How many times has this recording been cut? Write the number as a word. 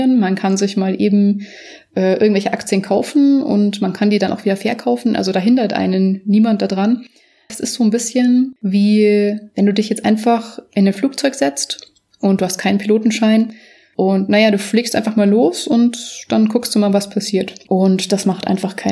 two